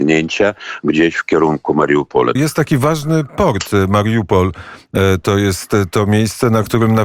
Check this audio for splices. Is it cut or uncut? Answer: cut